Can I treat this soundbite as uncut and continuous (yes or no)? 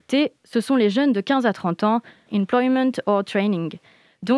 no